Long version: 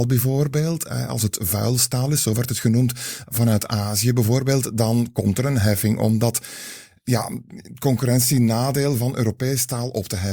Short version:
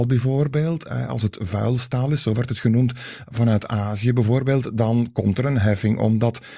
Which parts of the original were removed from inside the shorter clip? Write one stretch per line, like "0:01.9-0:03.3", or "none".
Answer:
none